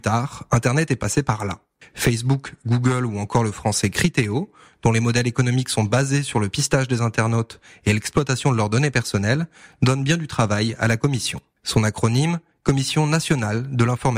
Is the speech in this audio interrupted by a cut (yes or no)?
yes